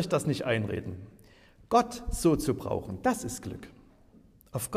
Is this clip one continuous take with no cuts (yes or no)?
yes